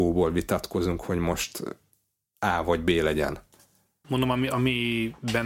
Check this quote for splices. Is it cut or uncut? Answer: cut